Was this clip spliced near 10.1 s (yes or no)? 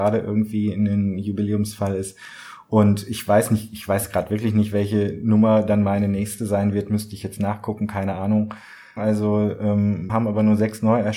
yes